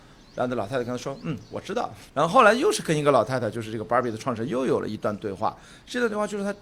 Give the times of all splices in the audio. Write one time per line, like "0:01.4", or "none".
0:02.1